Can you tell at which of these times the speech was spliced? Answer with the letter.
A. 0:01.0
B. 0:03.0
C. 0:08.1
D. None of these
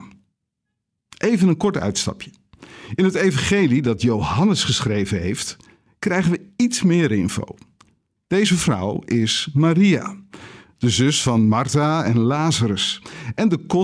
D